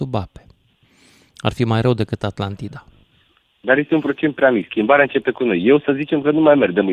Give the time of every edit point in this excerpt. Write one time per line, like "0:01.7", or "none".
none